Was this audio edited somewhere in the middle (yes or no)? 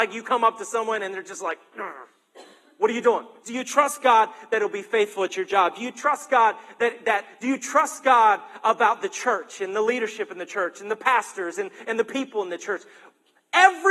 yes